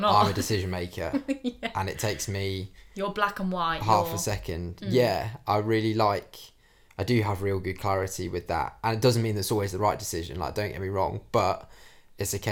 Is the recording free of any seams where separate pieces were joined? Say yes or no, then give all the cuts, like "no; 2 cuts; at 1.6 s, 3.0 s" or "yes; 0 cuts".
yes; 0 cuts